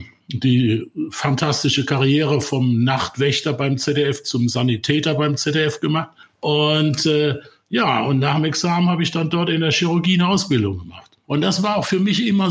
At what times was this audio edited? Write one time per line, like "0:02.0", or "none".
0:11.2